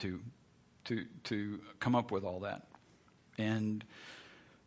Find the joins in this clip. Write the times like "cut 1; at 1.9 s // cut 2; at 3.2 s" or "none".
cut 1; at 3.2 s